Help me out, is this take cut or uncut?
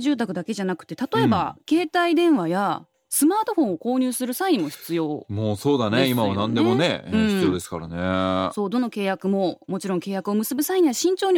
uncut